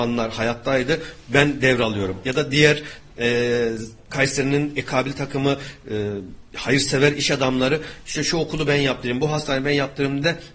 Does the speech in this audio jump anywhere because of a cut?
no; 0 cuts

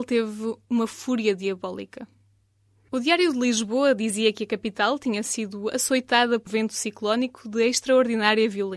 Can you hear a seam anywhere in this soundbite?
yes; 1 cut; at 6.5 s

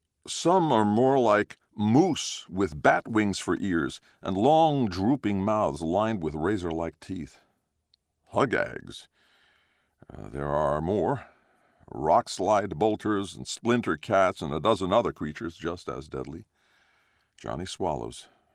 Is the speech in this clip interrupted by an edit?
no; 0 cuts

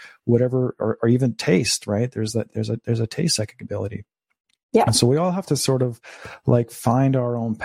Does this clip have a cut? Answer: no; 0 cuts

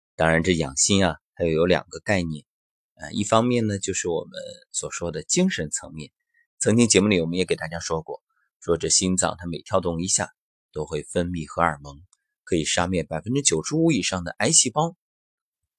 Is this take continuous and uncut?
no; 1 cut; at 6.5 s

